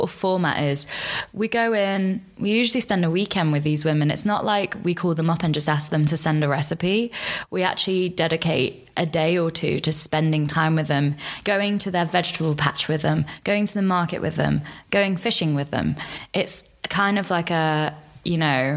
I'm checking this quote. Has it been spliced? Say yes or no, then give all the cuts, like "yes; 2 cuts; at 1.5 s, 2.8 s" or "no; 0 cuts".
yes; 1 cut; at 11.4 s